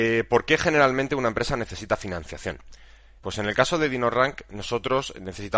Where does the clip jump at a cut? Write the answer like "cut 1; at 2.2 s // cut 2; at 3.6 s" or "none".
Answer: cut 1; at 3.2 s

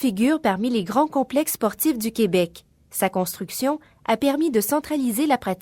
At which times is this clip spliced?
none

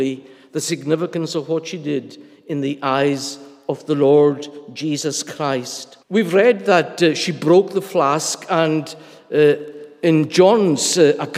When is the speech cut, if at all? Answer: cut 1; at 6.0 s

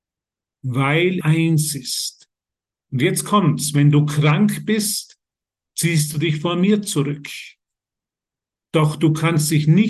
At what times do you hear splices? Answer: cut 1; at 1.2 s

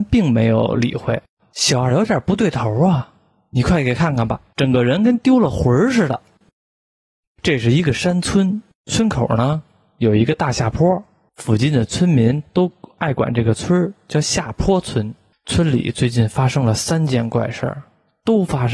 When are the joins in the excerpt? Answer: cut 1; at 1.4 s

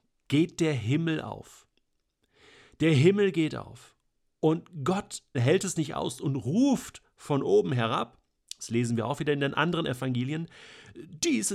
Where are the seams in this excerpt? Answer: cut 1; at 5.3 s

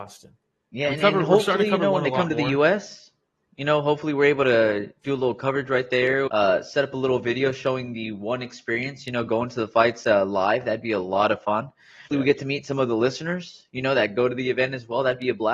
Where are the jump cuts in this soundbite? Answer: cut 1; at 6.3 s // cut 2; at 12.1 s

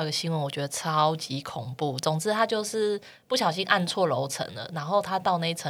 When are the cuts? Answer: none

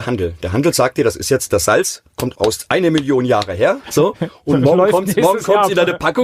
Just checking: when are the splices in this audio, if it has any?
cut 1; at 3.8 s

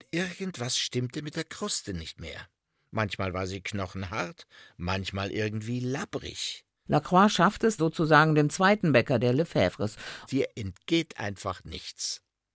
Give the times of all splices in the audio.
cut 1; at 7.8 s // cut 2; at 10.3 s

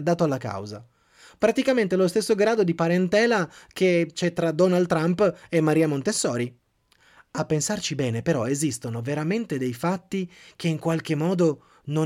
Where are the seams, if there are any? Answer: none

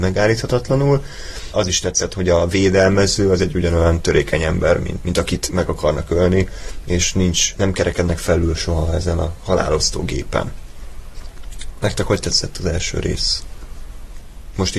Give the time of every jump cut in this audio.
cut 1; at 1.5 s // cut 2; at 5.0 s // cut 3; at 7.6 s

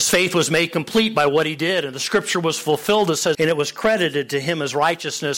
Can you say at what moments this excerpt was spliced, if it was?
cut 1; at 3.3 s

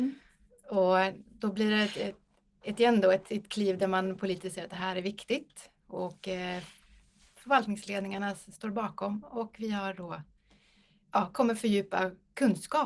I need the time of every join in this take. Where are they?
none

